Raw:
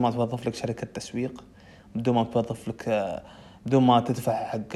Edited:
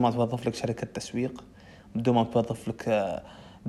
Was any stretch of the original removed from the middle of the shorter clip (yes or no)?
no